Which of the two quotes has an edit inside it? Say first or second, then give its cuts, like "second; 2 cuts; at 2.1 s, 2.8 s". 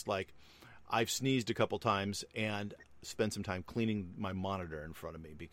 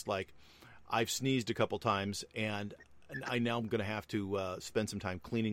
first; 1 cut; at 3.0 s